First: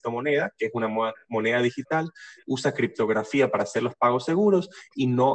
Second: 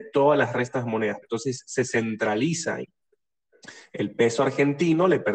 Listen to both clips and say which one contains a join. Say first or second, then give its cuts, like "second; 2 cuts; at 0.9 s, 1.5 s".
second; 1 cut; at 1.2 s